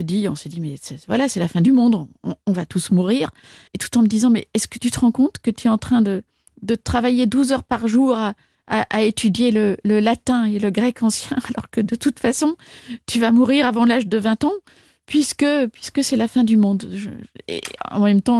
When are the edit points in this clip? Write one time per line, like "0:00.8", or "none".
0:03.7

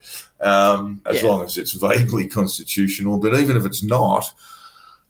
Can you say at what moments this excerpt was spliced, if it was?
0:01.1

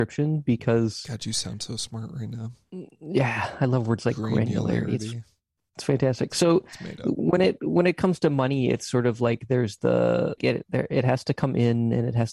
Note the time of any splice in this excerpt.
0:10.4

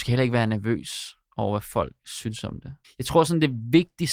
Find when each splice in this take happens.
0:02.8

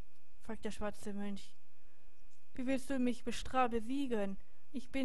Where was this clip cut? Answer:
0:02.6

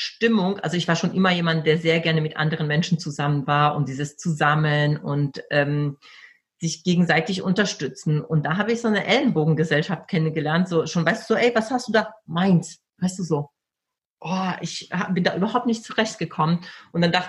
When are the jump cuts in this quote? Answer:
none

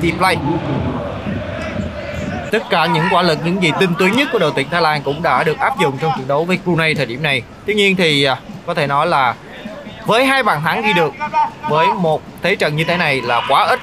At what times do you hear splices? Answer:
0:02.5

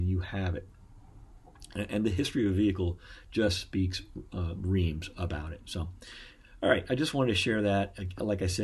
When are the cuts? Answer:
none

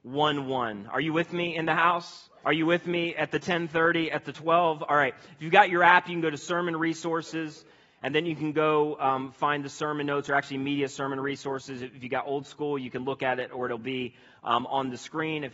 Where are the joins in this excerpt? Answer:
0:02.4

